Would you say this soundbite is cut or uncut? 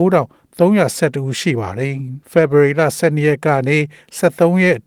cut